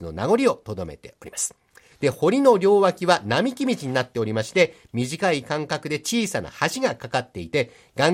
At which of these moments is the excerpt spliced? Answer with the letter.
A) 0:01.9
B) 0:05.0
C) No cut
A